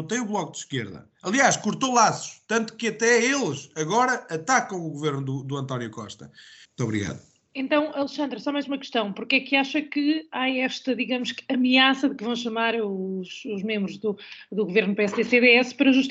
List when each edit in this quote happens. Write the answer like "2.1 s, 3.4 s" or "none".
6.6 s